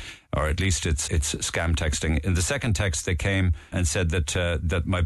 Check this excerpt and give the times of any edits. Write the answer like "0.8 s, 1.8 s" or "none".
1.1 s, 3.7 s